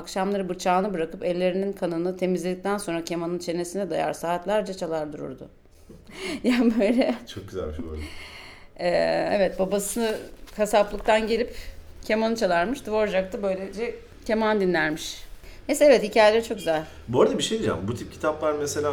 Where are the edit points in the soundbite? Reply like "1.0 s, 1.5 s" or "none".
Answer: none